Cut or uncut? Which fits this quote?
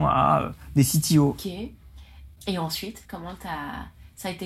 cut